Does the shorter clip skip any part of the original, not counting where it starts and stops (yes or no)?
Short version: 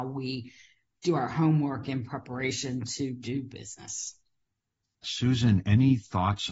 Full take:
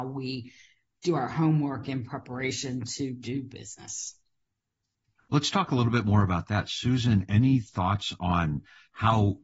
yes